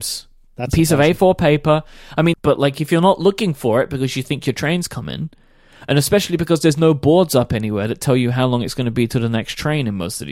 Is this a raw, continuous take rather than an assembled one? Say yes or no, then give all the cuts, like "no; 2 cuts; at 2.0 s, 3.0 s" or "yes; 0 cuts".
no; 1 cut; at 2.3 s